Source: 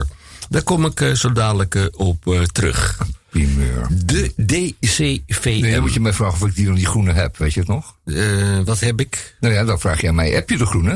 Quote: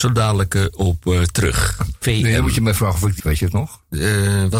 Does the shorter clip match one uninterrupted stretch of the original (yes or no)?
no